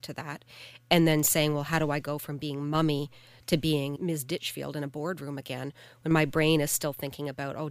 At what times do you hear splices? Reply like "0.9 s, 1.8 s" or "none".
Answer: 4.0 s